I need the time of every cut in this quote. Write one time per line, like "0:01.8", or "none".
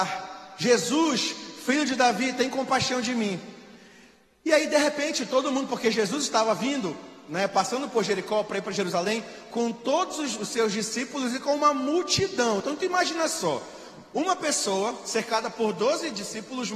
none